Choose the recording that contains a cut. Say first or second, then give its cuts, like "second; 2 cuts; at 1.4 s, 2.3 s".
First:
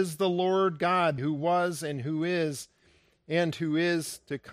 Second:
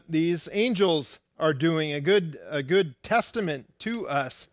first; 1 cut; at 1.2 s